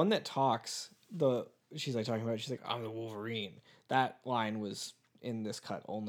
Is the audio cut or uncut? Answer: cut